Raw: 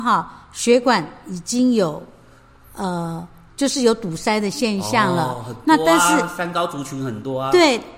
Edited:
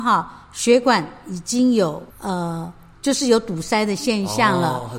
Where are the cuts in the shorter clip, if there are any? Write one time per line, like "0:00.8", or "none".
0:02.1

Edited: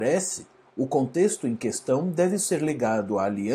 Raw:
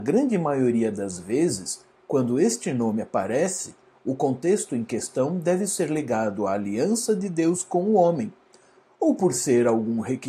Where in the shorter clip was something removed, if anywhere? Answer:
none

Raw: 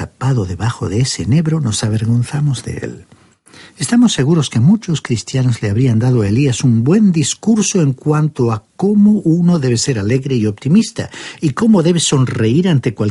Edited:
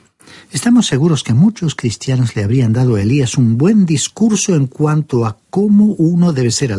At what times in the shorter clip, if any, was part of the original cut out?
none

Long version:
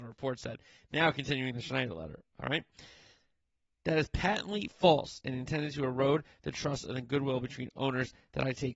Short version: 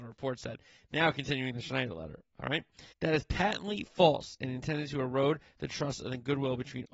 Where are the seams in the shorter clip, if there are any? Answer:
0:02.9

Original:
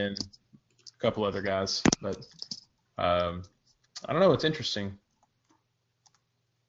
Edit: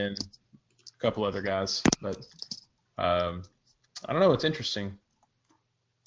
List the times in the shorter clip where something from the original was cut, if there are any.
none

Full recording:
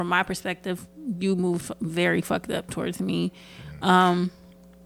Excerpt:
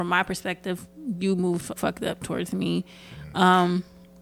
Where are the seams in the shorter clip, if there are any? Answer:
0:01.8

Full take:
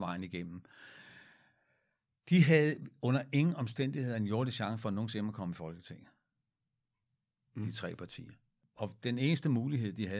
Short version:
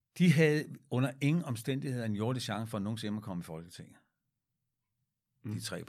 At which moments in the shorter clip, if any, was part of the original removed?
none

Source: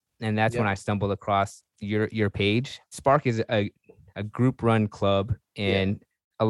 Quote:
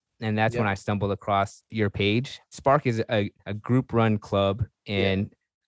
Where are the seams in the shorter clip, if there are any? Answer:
0:01.7
0:03.4

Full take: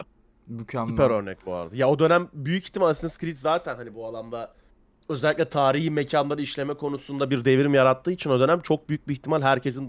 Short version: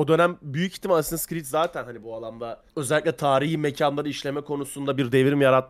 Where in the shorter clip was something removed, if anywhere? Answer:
0:02.7

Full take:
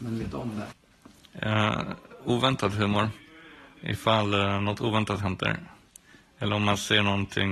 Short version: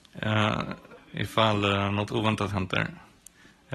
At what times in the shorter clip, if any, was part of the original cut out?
0:01.0

